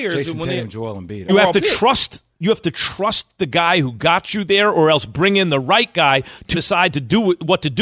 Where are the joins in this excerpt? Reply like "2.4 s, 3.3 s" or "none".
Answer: 1.3 s, 6.5 s